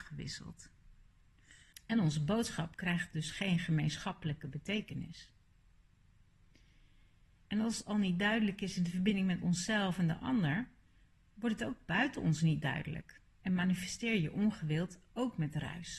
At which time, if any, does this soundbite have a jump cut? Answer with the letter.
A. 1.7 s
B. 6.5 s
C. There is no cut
A